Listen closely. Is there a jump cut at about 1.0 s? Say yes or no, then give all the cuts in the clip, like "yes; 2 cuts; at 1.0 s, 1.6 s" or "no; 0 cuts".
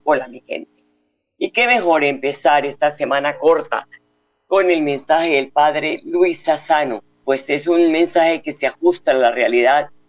no; 1 cut; at 7.2 s